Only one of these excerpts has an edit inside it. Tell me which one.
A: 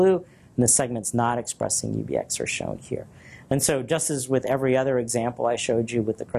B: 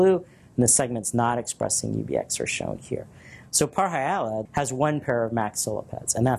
B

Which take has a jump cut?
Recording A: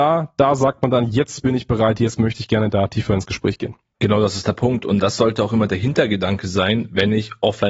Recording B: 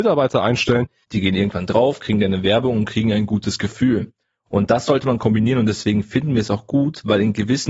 B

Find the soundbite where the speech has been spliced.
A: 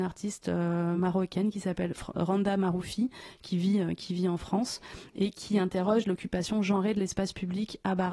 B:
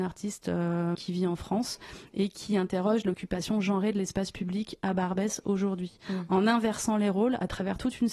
B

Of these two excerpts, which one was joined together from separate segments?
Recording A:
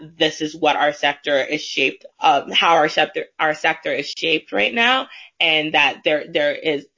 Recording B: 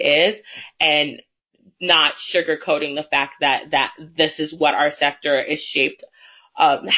A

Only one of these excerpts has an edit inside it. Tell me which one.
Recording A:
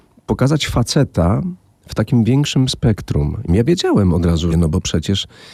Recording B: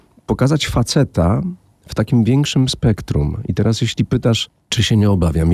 A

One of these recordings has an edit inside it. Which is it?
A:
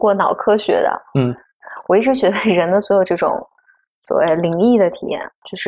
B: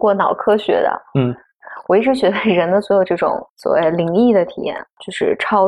B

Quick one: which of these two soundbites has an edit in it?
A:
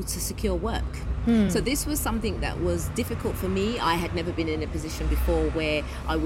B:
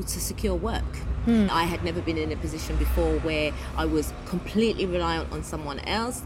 B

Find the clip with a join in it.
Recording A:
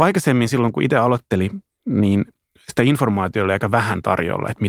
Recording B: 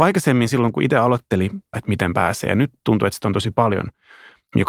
B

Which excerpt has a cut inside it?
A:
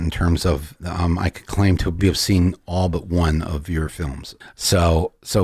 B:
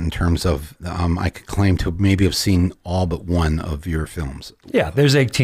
A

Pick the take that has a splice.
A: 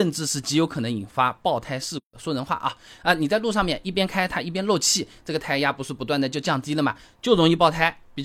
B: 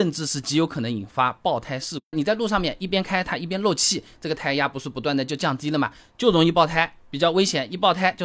B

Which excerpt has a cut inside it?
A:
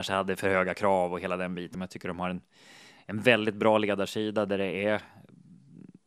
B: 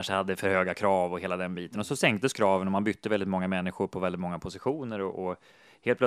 A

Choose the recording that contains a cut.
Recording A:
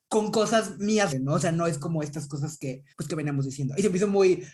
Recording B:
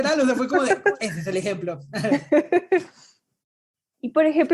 A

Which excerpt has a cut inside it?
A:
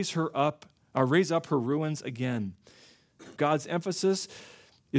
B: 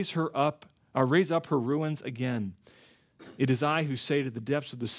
A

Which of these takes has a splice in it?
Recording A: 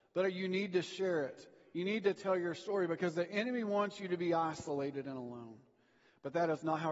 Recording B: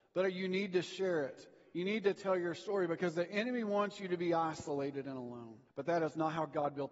B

